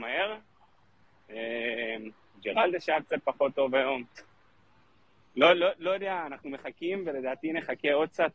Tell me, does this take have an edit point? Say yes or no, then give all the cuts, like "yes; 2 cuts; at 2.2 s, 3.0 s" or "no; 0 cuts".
no; 0 cuts